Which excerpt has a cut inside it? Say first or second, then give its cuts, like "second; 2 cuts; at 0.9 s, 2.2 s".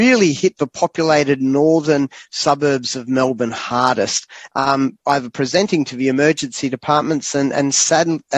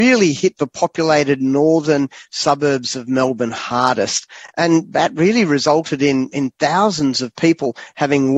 first; 1 cut; at 4.5 s